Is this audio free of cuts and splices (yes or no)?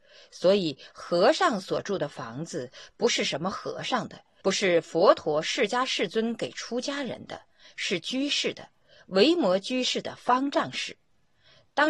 no